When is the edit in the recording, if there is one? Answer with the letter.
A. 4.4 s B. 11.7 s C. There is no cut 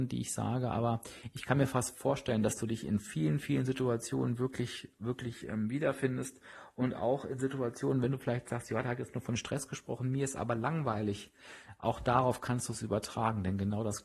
C